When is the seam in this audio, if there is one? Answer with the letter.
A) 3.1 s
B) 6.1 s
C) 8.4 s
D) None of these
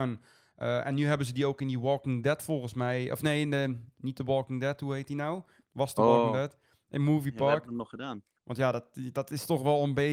C